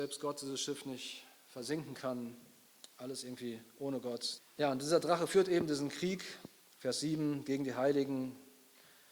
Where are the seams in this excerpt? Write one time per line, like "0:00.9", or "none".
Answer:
0:04.4